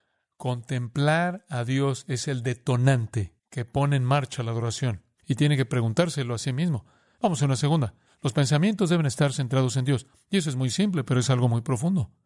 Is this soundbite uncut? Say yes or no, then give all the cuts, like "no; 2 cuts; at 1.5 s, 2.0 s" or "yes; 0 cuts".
no; 3 cuts; at 3.4 s, 5.2 s, 8.1 s